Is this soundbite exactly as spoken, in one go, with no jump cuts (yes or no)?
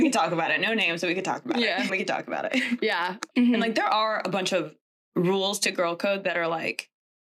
no